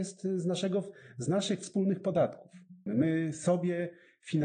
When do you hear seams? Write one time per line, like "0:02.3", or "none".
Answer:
0:02.9